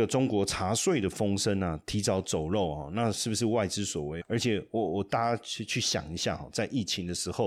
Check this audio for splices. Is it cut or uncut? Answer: cut